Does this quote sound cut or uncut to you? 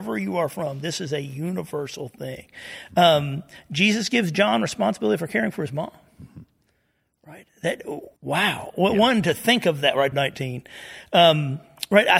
cut